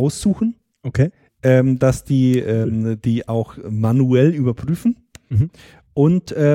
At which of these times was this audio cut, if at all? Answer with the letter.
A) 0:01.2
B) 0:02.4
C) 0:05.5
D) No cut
D